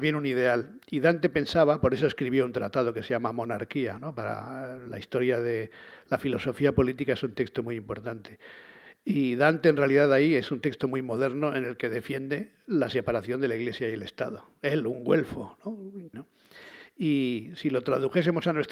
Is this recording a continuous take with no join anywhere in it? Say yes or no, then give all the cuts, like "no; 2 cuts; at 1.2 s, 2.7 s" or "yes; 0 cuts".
no; 1 cut; at 16.1 s